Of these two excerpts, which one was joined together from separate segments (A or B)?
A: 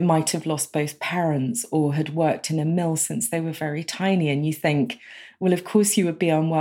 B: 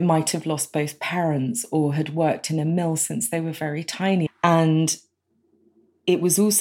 B